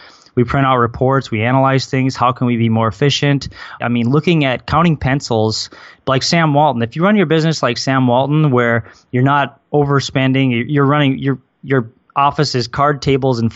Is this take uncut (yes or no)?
no